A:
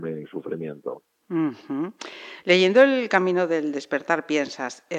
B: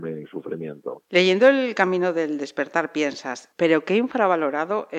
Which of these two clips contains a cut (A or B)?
B